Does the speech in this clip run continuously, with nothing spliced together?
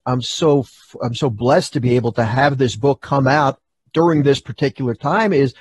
yes; 0 cuts

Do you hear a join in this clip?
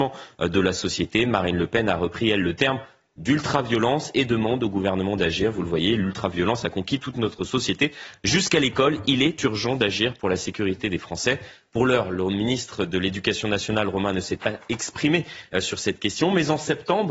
no; 0 cuts

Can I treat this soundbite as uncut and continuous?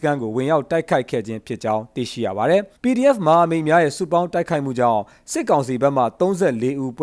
no; 1 cut; at 2.8 s

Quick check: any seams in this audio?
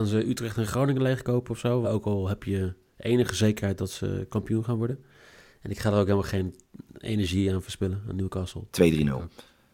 yes; 2 cuts; at 1.8 s, 8.7 s

